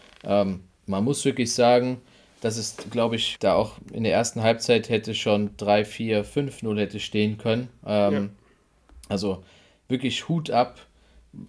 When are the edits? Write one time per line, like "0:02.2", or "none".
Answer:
0:03.4

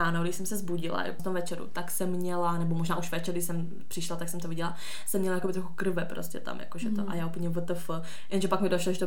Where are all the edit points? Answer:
0:01.2

